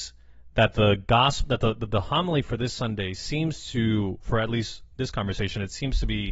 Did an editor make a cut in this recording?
no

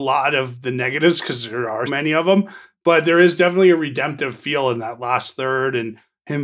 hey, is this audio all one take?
no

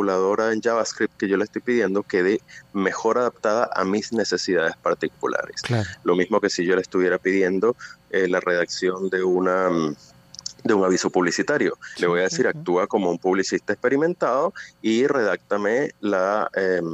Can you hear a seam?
no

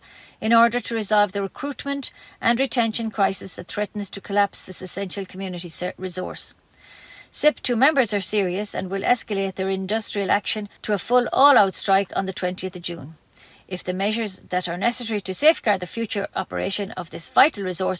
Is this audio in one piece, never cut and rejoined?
no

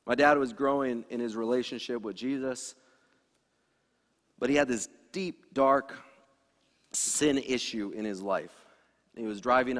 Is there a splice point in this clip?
no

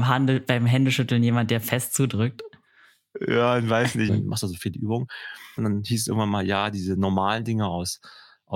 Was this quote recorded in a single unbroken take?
no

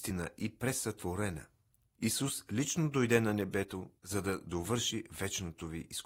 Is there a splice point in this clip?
yes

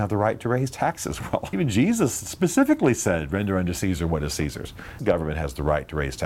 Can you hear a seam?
yes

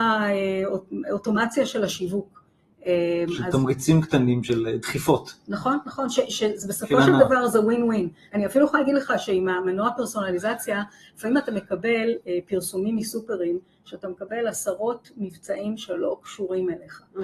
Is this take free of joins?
yes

